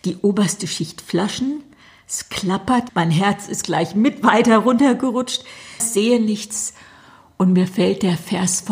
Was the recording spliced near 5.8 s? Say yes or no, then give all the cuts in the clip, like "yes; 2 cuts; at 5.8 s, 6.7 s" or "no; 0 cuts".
yes; 2 cuts; at 2.9 s, 5.8 s